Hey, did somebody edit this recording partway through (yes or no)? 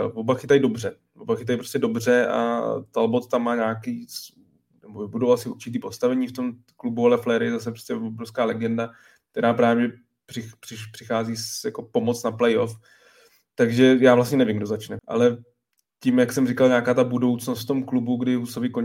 yes